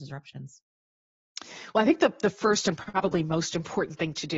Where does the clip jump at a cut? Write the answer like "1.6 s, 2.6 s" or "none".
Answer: none